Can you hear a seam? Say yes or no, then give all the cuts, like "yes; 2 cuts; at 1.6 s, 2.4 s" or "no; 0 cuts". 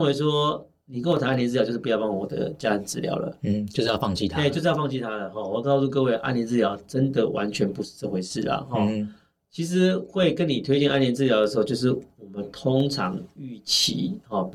no; 0 cuts